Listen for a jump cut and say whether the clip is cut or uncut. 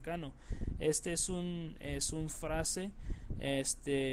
uncut